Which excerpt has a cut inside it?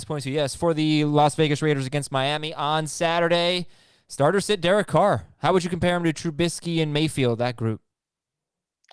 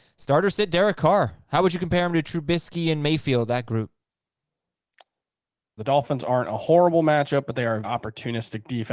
second; 2 cuts; at 5.8 s, 7.8 s

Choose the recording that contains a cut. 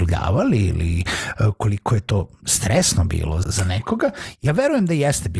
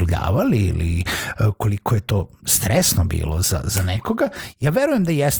first; 1 cut; at 3.4 s

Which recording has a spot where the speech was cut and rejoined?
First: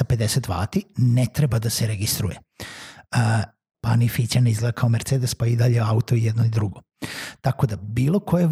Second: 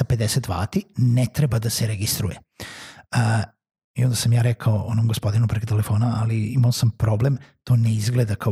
first; 1 cut; at 3.7 s

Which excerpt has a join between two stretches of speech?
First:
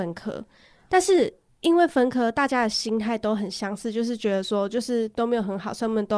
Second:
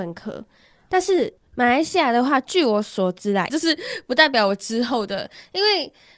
second; 2 cuts; at 1.4 s, 3.5 s

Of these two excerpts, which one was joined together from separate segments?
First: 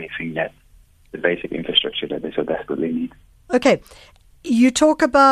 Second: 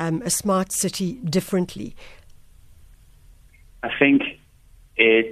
first; 1 cut; at 3.4 s

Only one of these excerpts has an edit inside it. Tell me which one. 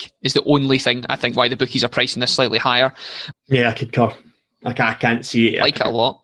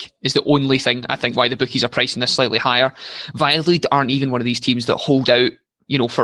first; 1 cut; at 3.3 s

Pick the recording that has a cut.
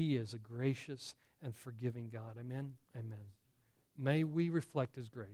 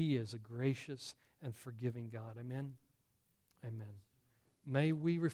first; 1 cut; at 2.8 s

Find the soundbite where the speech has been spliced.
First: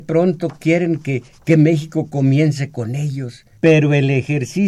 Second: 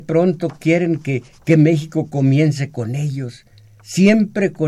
first; 1 cut; at 3.6 s

